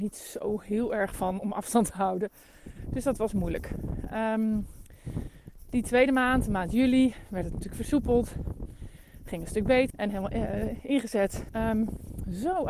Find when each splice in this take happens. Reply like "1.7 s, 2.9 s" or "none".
9.9 s, 11.5 s